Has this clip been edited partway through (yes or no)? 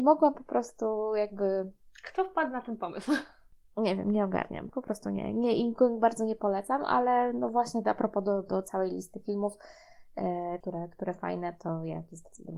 yes